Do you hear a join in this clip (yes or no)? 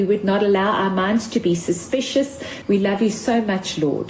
yes